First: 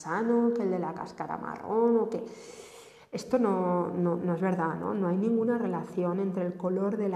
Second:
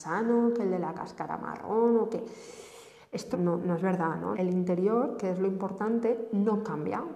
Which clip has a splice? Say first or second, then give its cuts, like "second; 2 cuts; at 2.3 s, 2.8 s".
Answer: second; 2 cuts; at 3.3 s, 4.3 s